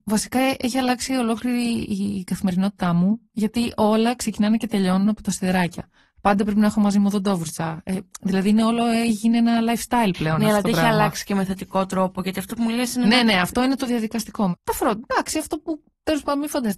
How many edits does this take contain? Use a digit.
2